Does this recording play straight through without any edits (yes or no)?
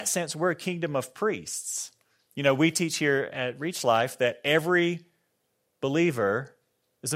yes